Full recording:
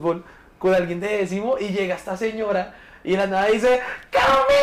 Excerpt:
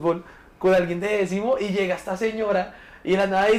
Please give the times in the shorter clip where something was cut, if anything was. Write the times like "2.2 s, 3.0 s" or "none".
none